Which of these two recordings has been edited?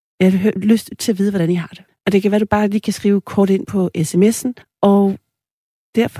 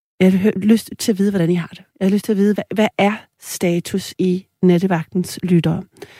first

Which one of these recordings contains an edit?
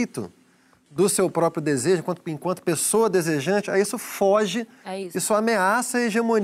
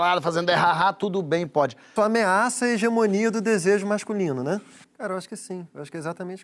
second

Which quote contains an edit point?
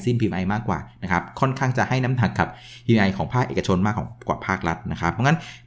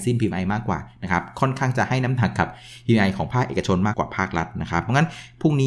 second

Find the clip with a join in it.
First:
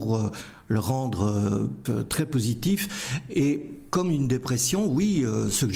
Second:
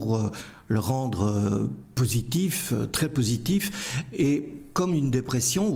first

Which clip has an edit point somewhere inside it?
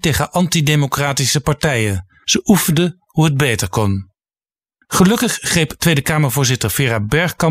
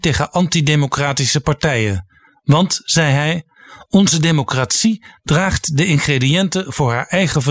first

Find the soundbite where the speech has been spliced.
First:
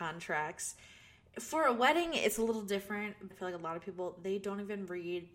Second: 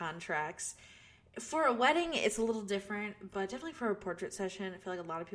first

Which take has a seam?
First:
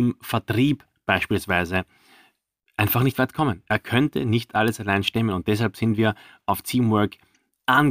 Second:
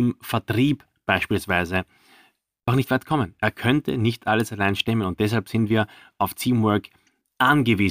second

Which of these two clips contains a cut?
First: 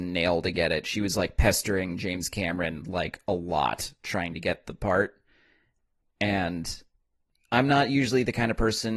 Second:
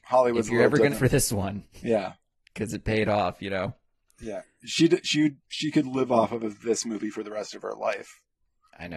second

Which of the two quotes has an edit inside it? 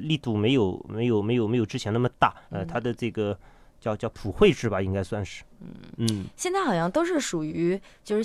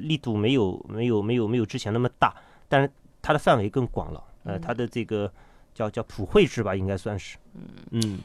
first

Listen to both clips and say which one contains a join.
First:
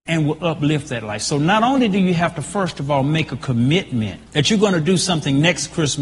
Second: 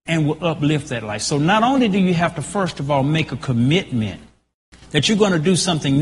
first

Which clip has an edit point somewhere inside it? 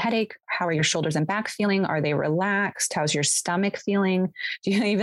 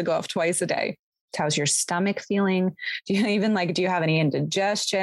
second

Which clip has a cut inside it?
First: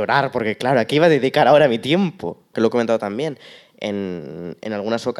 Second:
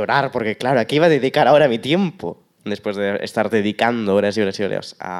first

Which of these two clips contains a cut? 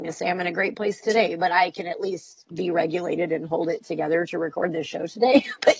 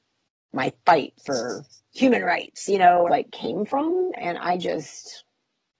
second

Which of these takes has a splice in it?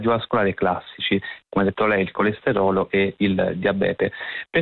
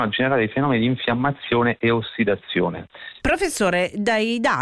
second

